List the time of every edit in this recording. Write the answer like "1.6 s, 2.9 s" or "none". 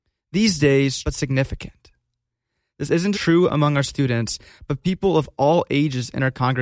1.0 s, 3.1 s